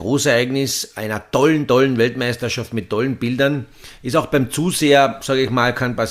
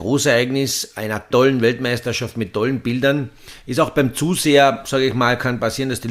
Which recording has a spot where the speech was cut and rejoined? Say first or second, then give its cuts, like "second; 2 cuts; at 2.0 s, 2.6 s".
second; 1 cut; at 1.3 s